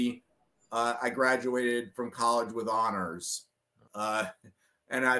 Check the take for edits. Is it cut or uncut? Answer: cut